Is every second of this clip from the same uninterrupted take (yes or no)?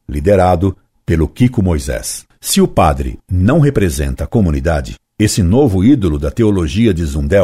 no